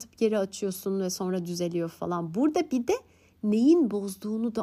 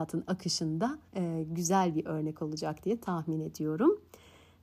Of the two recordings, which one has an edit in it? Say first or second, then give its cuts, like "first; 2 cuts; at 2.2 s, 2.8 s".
second; 1 cut; at 1.1 s